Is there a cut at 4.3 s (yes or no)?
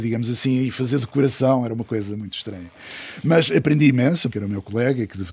yes